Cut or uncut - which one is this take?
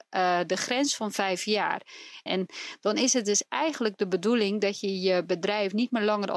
cut